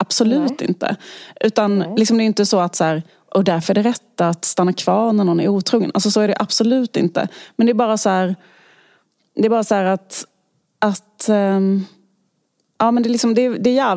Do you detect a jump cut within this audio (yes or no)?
no